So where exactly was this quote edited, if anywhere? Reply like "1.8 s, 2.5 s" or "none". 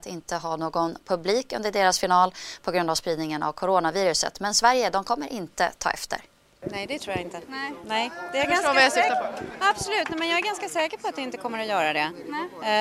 6.6 s